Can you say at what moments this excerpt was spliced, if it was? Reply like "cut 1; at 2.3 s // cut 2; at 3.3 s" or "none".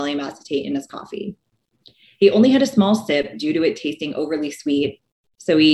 none